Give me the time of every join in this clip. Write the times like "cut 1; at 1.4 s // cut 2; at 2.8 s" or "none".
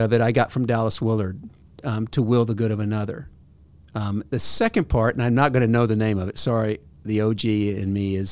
none